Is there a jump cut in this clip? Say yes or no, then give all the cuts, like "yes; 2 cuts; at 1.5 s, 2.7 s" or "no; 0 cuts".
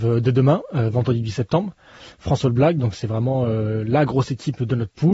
no; 0 cuts